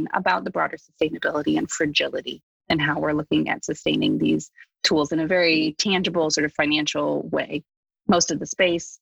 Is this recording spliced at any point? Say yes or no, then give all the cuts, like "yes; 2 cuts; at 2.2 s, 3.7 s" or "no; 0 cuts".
no; 0 cuts